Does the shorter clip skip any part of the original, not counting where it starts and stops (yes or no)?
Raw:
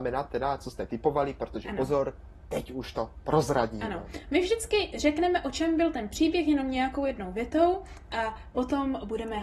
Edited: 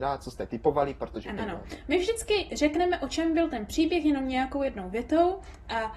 yes